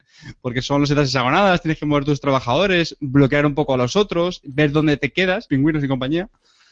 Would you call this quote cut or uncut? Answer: cut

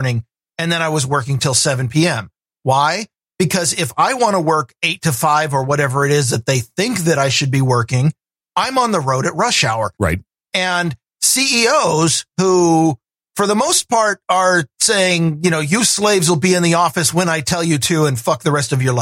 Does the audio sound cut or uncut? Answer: cut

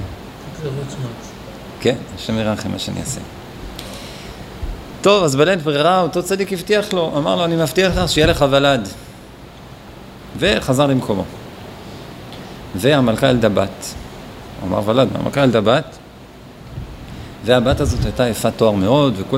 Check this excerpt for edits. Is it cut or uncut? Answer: cut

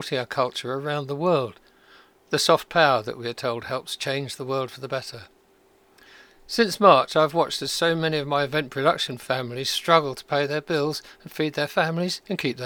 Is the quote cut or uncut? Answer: uncut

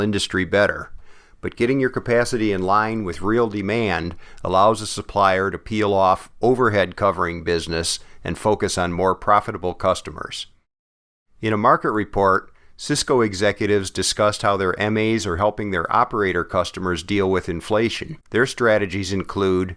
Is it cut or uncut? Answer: cut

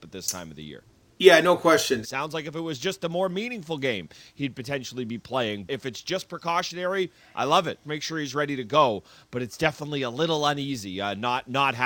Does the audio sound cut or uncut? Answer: cut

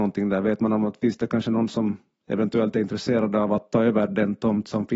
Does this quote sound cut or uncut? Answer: uncut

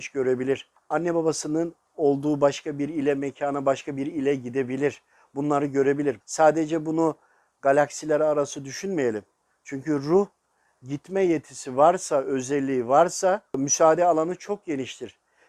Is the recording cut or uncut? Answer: cut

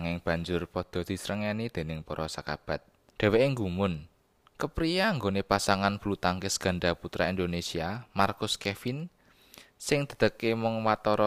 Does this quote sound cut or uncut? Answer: cut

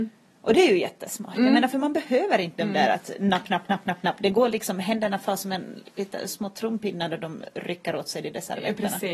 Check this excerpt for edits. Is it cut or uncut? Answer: uncut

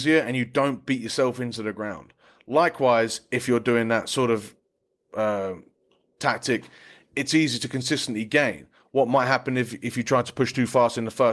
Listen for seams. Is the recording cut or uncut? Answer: uncut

